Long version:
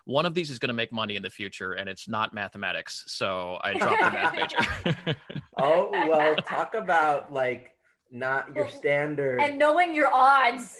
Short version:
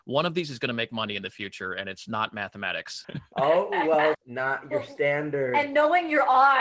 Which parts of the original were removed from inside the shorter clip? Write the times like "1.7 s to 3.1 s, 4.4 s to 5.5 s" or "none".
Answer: 3.0 s to 5.3 s, 6.4 s to 8.0 s